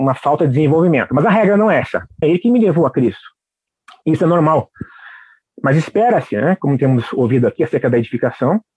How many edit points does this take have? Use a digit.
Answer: 1